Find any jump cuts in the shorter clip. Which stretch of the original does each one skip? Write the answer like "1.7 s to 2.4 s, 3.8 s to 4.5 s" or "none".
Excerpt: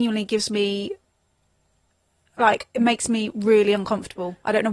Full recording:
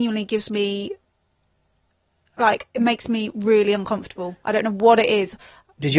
none